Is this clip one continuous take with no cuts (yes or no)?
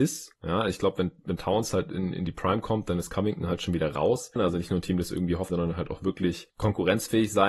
no